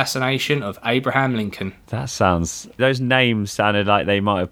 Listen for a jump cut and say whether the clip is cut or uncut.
cut